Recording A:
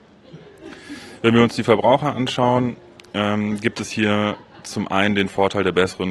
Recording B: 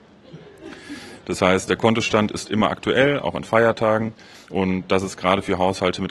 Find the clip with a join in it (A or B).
B